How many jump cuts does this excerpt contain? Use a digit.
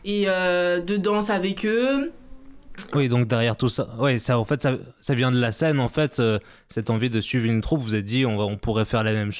1